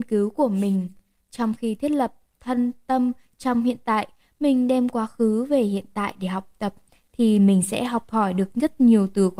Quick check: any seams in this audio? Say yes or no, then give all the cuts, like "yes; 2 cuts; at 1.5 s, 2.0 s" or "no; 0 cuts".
no; 0 cuts